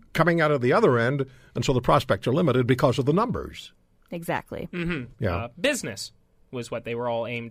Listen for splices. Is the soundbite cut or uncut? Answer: cut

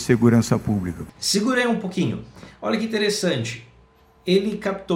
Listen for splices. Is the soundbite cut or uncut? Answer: uncut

